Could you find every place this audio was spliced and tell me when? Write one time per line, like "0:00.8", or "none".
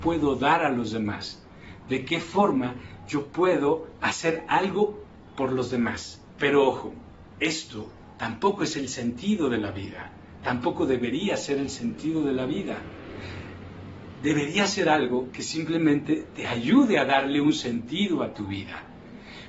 0:06.3

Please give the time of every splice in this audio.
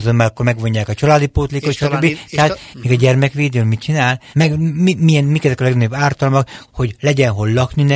0:02.7
0:04.3
0:06.7

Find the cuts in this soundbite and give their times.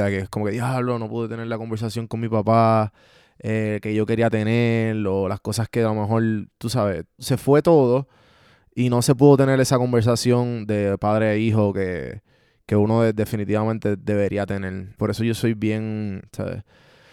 0:07.2
0:15.0
0:16.2

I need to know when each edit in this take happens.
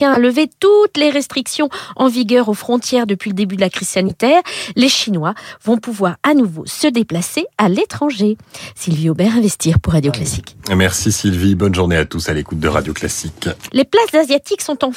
0:13.7

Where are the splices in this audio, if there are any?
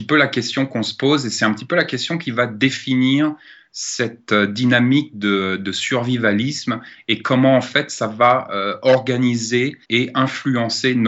0:09.8

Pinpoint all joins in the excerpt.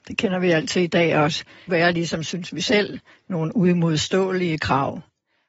0:01.7

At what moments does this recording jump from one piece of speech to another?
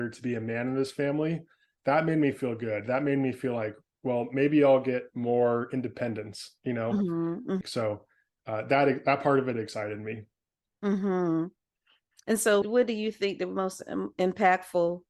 0:07.6
0:12.6

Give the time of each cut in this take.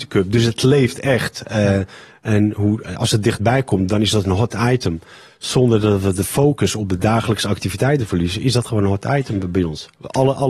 none

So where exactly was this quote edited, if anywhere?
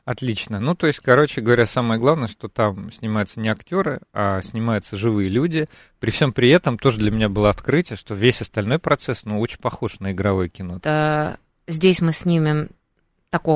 0:10.8

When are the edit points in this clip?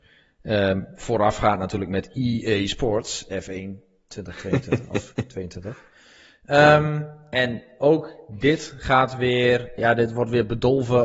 0:07.3
0:09.8

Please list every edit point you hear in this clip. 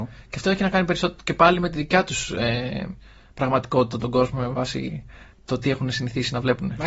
0:04.0

